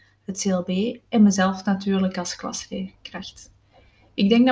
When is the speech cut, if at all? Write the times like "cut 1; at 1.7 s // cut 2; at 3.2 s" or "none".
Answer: none